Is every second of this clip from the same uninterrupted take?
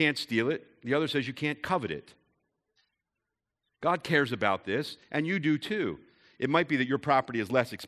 yes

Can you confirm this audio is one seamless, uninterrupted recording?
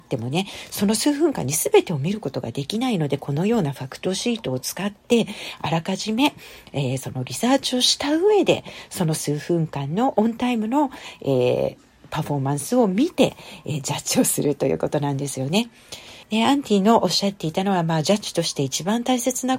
no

